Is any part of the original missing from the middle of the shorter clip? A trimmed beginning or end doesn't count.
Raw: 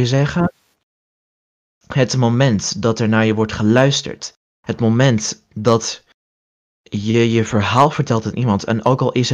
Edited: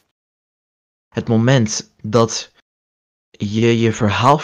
yes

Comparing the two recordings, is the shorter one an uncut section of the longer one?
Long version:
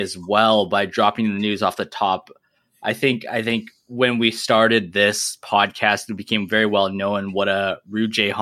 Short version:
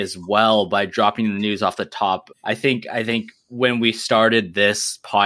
no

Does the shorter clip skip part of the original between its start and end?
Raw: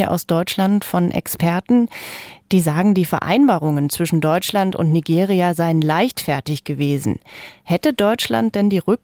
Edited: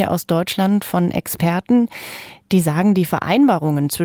no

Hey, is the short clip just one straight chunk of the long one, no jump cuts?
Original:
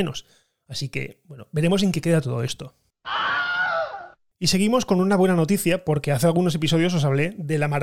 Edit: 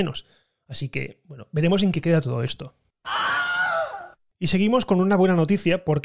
yes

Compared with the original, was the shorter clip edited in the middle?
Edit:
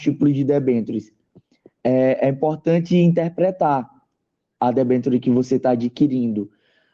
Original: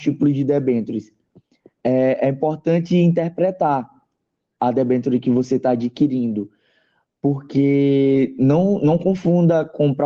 no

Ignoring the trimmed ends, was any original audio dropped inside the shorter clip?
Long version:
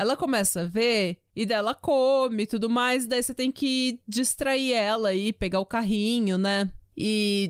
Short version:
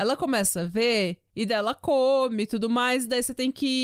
no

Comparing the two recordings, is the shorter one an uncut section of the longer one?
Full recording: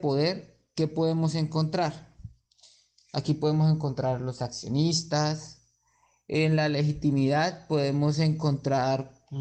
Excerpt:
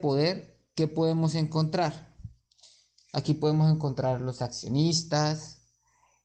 yes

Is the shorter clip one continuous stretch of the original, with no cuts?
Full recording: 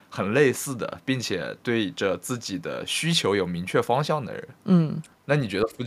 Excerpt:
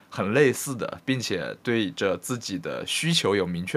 yes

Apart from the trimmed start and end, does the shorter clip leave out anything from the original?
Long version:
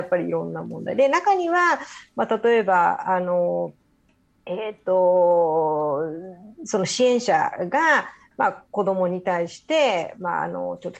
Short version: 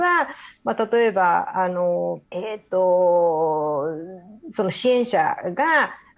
yes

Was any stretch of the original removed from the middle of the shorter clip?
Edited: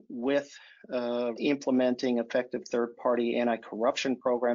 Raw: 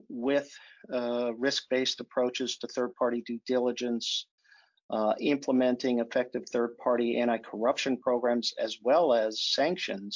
yes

